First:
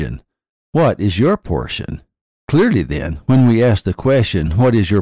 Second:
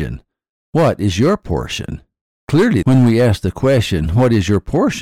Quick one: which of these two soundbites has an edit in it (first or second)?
second